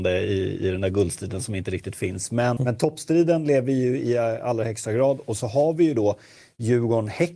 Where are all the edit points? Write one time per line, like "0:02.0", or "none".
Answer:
0:02.6